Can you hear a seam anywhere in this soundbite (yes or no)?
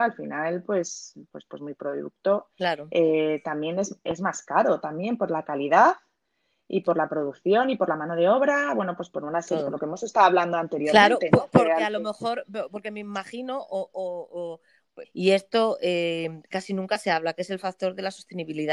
yes